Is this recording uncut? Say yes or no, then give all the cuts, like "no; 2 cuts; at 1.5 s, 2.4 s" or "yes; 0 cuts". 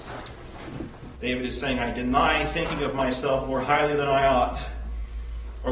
no; 1 cut; at 1.2 s